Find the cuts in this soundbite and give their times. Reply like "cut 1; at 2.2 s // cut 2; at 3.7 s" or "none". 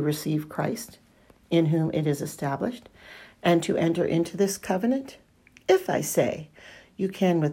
none